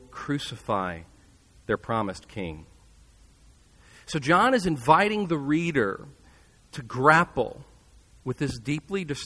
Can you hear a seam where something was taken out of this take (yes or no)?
no